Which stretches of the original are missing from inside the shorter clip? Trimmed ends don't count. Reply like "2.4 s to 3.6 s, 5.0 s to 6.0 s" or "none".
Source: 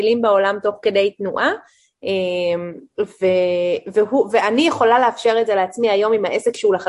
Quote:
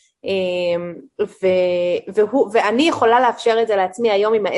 none